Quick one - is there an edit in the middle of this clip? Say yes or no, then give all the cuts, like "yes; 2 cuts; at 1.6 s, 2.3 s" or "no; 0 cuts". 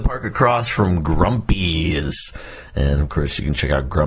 no; 0 cuts